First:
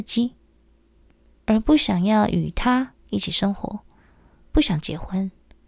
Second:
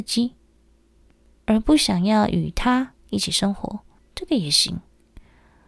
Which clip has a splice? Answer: second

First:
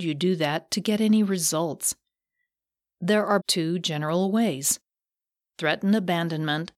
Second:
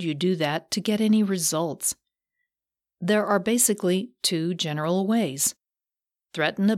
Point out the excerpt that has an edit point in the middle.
first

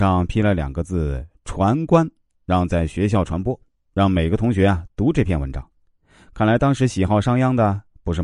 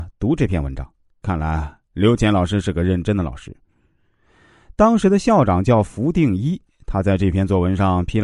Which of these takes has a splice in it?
second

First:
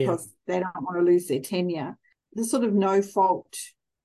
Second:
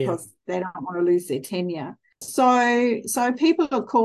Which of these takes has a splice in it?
second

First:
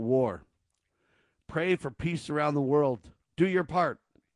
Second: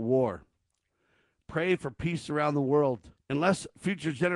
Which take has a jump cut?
second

